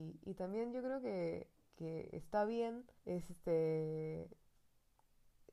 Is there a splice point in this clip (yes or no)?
yes